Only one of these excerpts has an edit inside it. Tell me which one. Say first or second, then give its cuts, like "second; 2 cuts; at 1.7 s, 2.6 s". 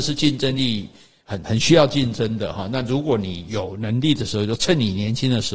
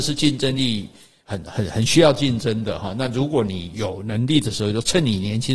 first; 1 cut; at 1.5 s